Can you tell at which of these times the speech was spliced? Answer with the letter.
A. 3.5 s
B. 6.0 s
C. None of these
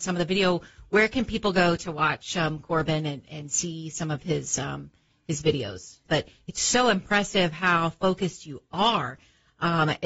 B